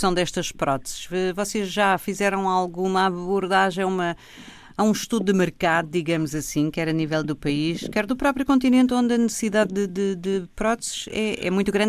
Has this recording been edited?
no; 0 cuts

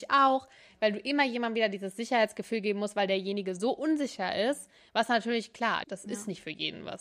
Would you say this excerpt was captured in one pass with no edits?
no; 1 cut; at 5.8 s

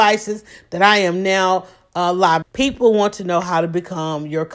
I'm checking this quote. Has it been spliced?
yes; 1 cut; at 2.4 s

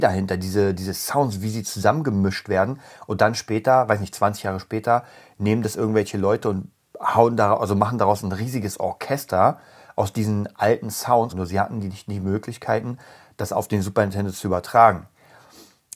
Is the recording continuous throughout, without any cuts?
no; 1 cut; at 11.3 s

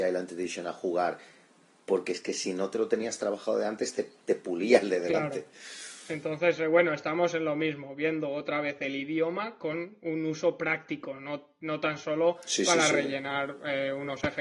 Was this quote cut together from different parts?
no; 0 cuts

